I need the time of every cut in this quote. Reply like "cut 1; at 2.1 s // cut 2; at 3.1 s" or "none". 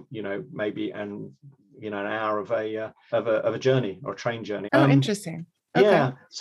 cut 1; at 3.1 s // cut 2; at 4.7 s